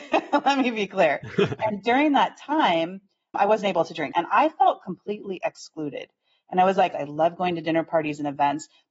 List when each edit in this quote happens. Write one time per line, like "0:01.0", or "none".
0:04.1
0:06.9